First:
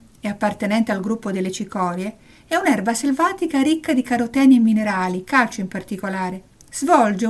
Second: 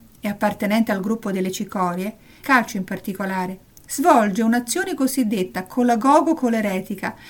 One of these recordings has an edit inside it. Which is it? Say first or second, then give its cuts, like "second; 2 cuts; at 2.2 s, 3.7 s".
second; 1 cut; at 2.4 s